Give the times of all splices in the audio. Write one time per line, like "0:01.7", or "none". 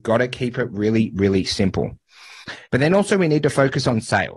0:01.1
0:02.6